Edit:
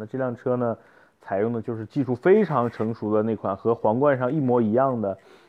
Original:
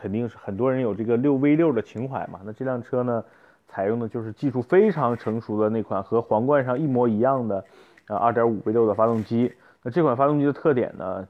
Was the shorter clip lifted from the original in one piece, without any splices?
yes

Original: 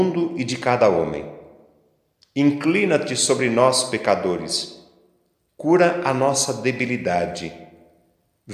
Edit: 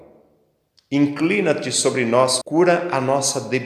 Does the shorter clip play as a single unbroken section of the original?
no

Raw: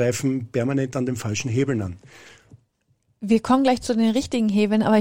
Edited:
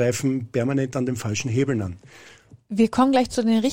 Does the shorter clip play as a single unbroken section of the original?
no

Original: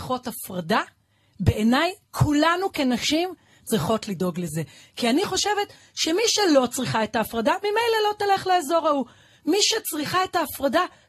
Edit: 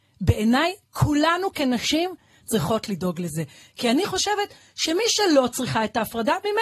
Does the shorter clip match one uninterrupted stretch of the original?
yes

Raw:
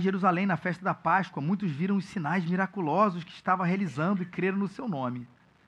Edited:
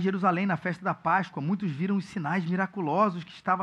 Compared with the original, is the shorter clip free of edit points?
yes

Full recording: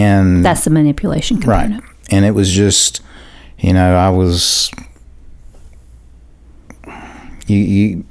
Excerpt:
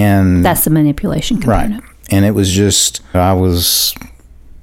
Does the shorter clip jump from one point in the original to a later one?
yes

